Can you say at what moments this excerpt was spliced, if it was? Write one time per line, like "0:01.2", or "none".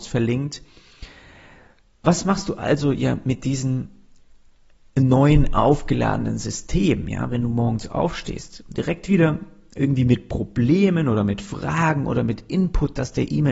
none